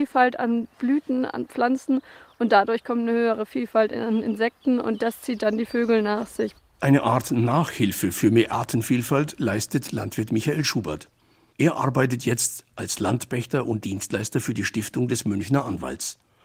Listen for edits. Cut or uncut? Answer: uncut